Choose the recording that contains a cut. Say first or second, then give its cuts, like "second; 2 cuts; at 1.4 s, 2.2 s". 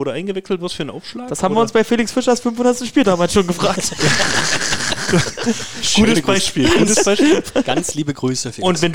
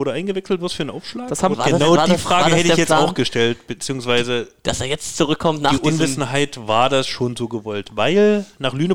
second; 1 cut; at 1.5 s